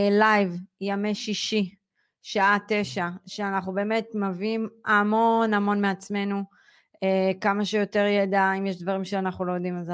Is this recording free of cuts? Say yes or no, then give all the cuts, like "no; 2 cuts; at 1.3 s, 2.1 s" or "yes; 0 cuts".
yes; 0 cuts